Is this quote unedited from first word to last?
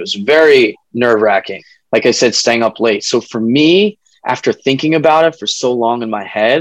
yes; 0 cuts

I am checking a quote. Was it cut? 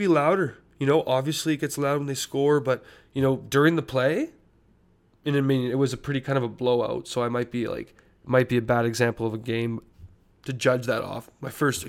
no; 0 cuts

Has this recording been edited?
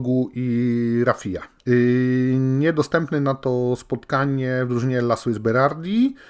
yes; 1 cut; at 1.6 s

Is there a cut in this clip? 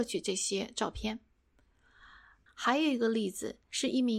yes; 1 cut; at 2.5 s

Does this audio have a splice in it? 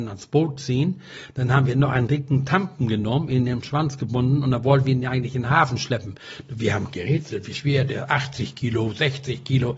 no; 0 cuts

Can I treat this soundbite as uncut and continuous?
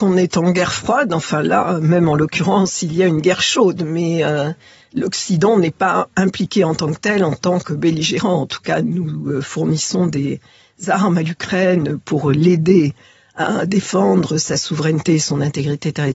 yes; 0 cuts

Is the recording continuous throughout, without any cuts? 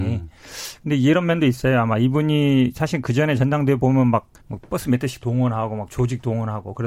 no; 1 cut; at 4.4 s

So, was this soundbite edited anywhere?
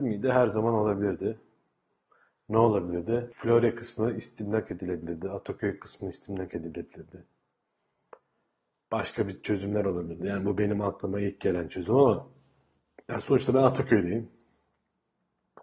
no; 0 cuts

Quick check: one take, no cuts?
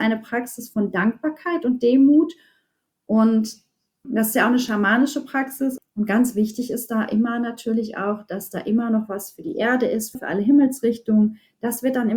no; 3 cuts; at 4.0 s, 5.8 s, 10.1 s

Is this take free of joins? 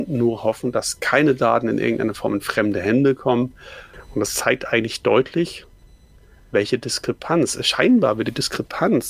yes; 0 cuts

